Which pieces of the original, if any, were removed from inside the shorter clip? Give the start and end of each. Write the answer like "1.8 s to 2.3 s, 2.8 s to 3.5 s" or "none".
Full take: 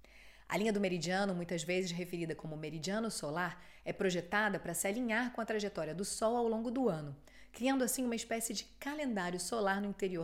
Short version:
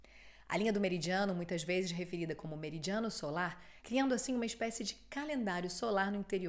3.8 s to 7.5 s